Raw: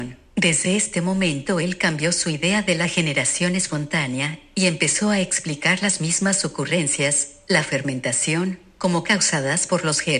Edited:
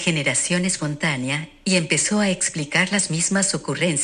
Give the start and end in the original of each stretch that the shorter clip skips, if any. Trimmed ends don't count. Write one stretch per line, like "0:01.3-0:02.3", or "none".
none